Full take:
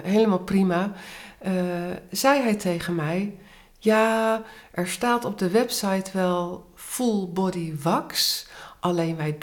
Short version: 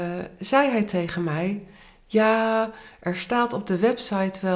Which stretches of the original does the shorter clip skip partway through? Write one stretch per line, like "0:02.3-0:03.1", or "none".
none